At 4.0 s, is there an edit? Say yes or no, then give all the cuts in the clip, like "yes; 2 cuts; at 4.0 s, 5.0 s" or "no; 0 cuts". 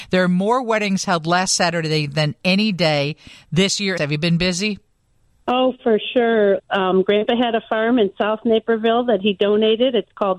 yes; 2 cuts; at 4.0 s, 6.6 s